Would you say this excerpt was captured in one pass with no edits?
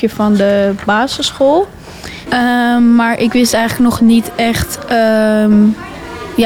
no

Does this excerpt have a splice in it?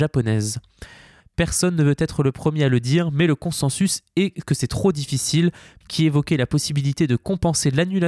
yes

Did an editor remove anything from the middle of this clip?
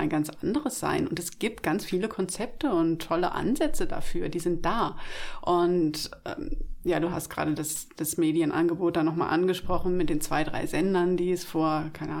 no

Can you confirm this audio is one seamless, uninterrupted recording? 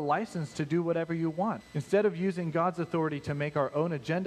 no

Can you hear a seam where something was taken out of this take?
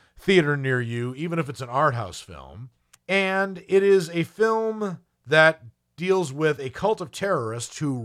yes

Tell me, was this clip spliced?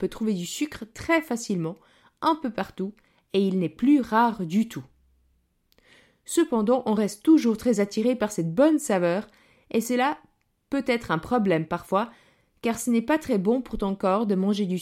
no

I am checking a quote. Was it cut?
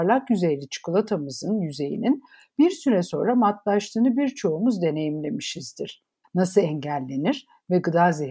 yes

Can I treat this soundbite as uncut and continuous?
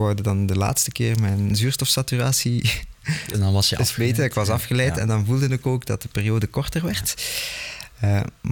yes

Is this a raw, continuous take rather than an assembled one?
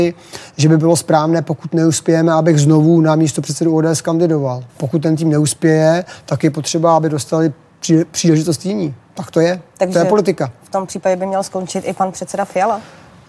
no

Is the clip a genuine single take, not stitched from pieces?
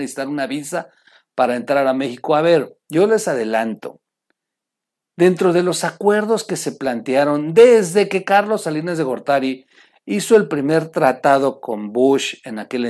yes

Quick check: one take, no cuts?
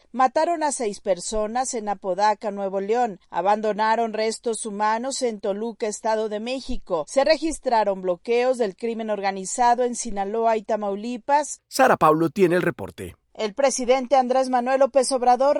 no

